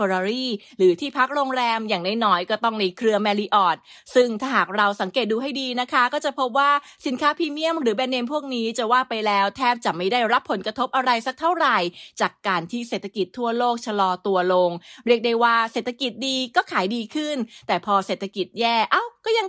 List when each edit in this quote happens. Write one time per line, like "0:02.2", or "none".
none